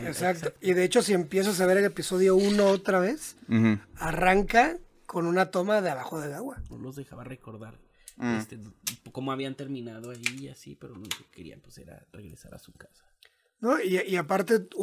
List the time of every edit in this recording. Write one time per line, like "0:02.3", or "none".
0:06.7